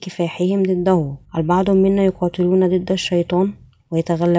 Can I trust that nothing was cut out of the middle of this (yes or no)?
no